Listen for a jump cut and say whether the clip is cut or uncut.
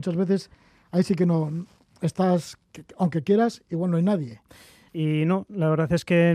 cut